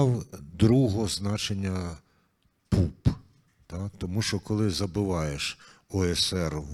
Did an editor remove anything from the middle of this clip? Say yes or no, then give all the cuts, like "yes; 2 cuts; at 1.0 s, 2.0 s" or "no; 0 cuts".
no; 0 cuts